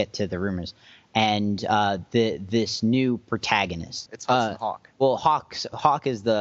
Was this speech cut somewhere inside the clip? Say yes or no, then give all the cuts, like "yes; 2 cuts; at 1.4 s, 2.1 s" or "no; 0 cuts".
yes; 1 cut; at 4.1 s